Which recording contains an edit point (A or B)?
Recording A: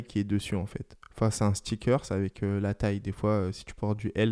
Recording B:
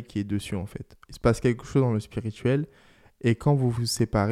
B